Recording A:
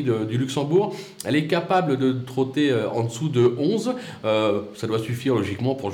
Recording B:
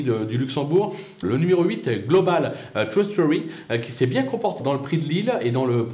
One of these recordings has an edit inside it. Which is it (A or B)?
B